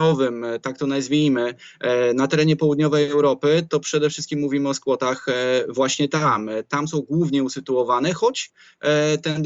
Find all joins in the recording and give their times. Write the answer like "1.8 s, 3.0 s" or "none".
none